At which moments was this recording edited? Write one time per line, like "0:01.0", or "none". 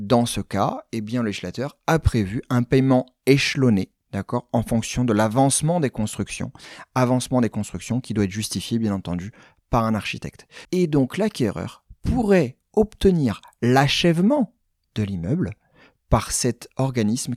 0:10.6